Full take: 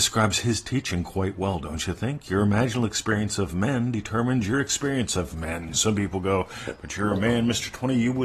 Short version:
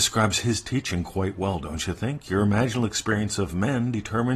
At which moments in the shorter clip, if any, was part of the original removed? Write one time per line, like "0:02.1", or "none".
none